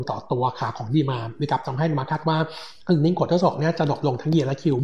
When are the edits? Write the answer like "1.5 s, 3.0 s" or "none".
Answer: 2.8 s

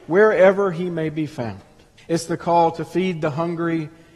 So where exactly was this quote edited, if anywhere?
2.0 s

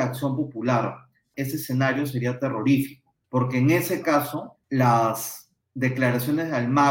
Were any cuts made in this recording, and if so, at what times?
1.3 s, 3.2 s, 4.6 s

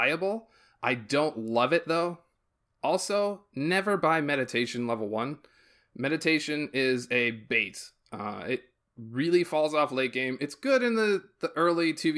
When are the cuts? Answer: none

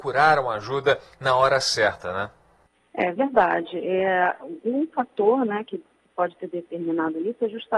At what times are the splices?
none

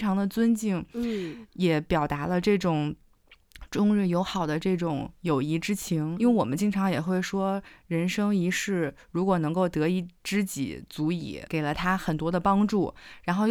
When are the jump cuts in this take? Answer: 6.2 s, 11.5 s

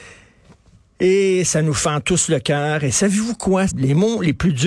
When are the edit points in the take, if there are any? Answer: 3.7 s

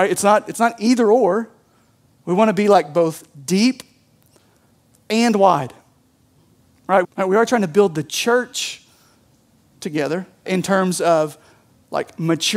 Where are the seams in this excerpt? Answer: 7.0 s, 10.5 s

